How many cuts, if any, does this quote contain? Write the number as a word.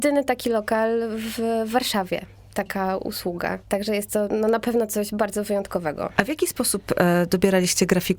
zero